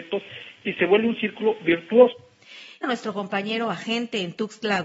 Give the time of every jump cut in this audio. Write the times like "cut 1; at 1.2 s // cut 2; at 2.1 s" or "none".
cut 1; at 2.8 s